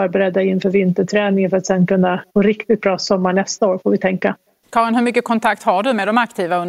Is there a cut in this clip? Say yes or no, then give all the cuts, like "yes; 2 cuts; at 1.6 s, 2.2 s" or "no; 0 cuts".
yes; 2 cuts; at 2.3 s, 4.6 s